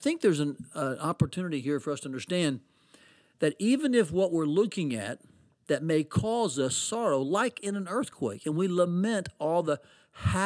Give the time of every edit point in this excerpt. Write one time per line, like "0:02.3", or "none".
none